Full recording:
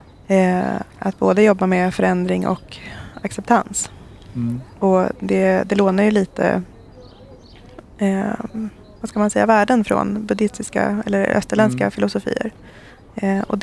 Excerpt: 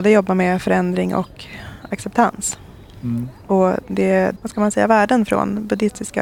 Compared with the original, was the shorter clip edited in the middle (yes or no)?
yes